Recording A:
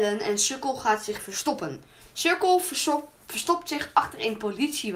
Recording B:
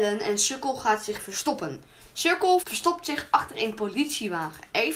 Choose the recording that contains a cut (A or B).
B